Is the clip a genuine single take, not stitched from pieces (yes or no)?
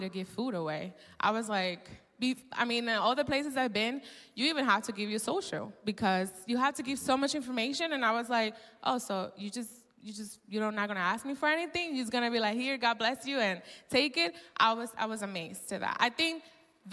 yes